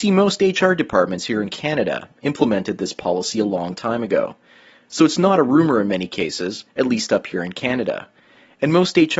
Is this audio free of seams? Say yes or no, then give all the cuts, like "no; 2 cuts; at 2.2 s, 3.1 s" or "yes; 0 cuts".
no; 1 cut; at 6.7 s